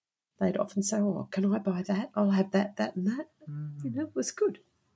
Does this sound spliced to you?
no; 0 cuts

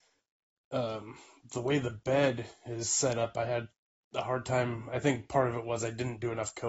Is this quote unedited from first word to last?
yes; 0 cuts

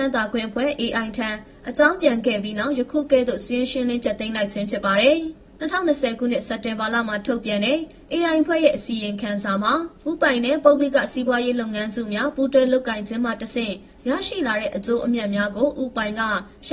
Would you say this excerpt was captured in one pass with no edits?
yes; 0 cuts

